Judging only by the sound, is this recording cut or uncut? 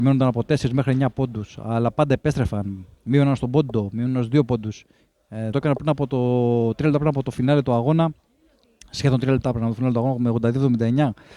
cut